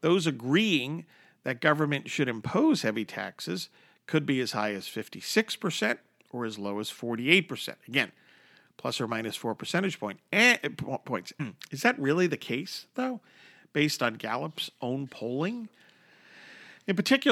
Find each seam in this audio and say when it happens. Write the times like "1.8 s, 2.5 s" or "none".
11.4 s